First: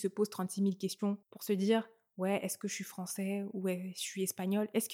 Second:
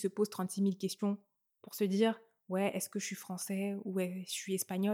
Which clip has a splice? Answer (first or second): first